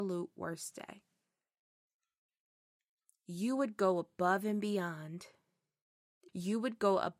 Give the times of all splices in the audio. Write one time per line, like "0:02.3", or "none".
0:06.3